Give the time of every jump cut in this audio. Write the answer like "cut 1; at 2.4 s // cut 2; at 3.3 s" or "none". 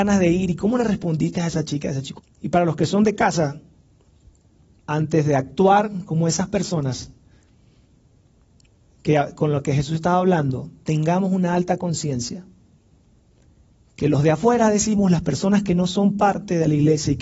cut 1; at 2.2 s // cut 2; at 4.8 s